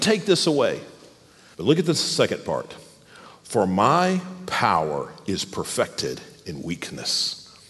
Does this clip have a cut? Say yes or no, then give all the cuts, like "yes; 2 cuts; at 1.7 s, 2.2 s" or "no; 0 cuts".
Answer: yes; 1 cut; at 1.5 s